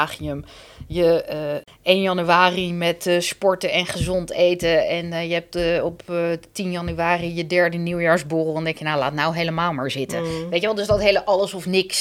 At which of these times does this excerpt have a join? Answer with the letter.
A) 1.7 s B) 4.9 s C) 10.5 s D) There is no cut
A